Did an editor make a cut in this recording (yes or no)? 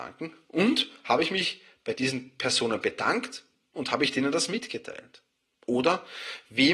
no